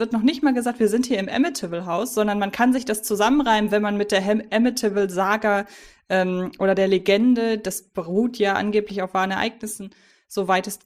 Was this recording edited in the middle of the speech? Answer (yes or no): no